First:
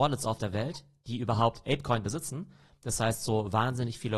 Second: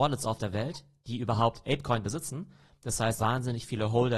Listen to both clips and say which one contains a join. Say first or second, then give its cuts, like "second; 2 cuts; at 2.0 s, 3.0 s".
second; 1 cut; at 3.2 s